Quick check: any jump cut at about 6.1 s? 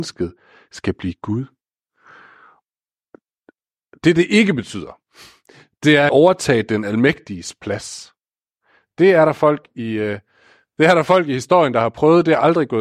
yes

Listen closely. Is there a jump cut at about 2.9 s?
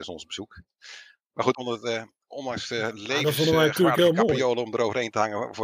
no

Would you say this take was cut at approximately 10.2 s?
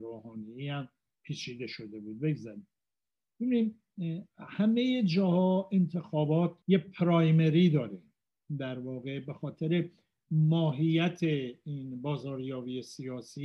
no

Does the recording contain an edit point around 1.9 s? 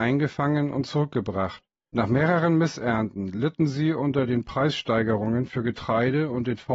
yes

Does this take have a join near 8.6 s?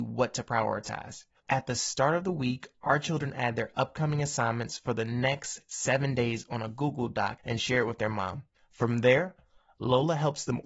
no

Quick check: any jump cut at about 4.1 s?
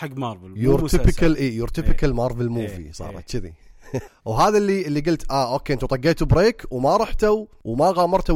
yes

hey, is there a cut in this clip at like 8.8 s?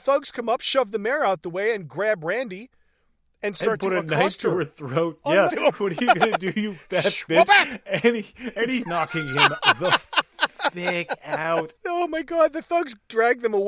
yes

